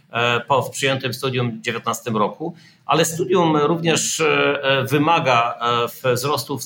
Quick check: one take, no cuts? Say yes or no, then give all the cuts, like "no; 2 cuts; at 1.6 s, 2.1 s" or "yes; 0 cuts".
yes; 0 cuts